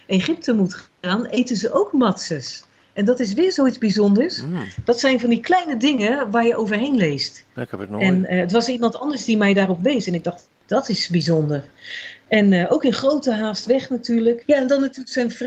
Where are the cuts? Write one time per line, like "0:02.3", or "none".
0:10.6
0:14.4